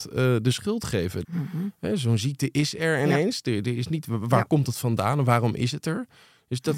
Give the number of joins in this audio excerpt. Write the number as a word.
one